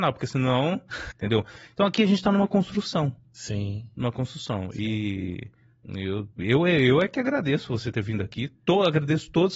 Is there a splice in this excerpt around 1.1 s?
yes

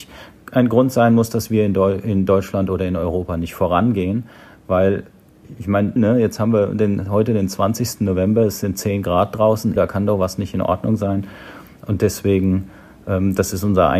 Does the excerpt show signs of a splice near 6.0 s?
yes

